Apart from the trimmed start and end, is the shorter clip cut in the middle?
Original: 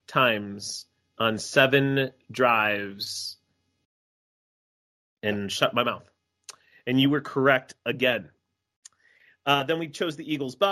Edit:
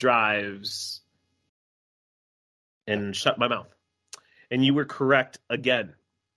no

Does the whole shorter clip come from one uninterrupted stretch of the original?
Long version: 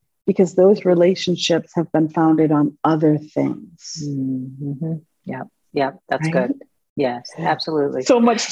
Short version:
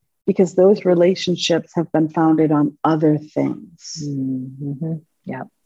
yes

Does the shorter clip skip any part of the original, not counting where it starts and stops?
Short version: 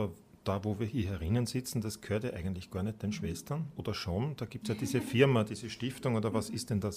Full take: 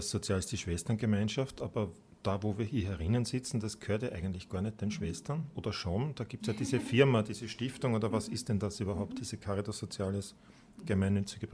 no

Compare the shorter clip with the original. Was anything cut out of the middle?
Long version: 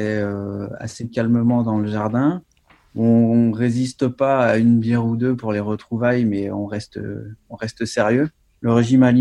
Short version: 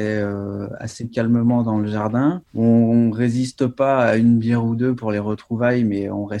yes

